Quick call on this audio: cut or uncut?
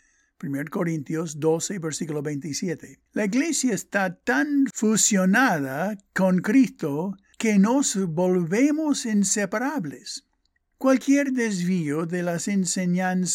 cut